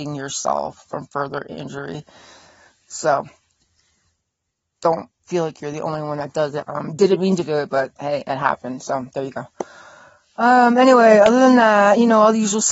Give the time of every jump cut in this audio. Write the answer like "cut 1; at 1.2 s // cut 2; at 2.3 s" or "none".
cut 1; at 6.6 s